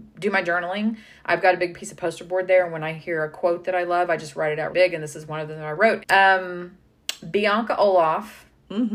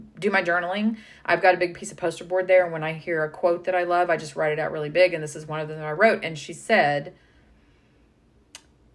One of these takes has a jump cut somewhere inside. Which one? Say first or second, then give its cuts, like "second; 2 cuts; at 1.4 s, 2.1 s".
first; 2 cuts; at 4.7 s, 6.0 s